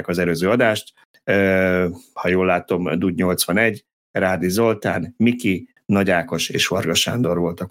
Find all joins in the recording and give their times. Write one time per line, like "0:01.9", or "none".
0:05.8